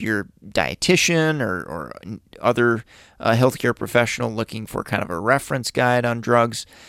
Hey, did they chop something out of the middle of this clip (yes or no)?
no